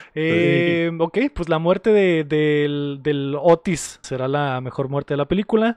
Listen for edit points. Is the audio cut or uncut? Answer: cut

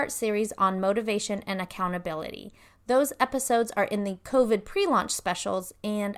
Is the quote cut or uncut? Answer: uncut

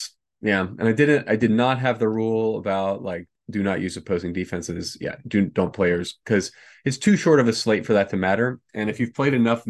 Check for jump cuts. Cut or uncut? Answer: uncut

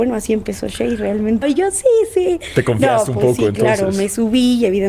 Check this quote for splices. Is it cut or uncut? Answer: cut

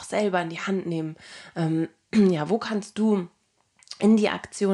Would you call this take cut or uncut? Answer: uncut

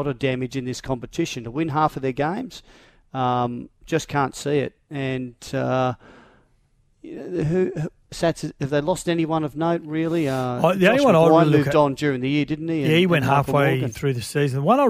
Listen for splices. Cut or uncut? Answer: uncut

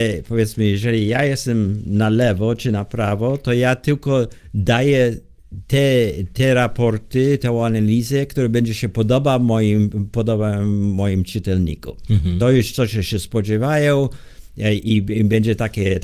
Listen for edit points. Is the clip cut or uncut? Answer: uncut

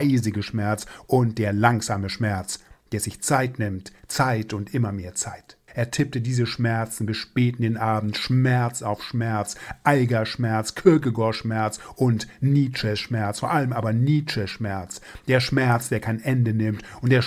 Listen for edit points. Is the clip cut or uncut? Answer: cut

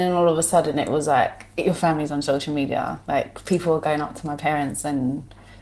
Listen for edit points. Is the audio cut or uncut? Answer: uncut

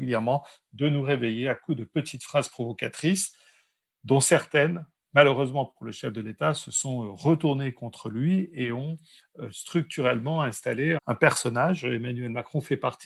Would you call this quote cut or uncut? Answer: cut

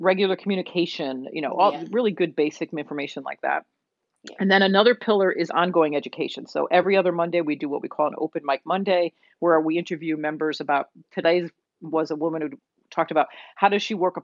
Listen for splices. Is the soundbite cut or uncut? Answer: uncut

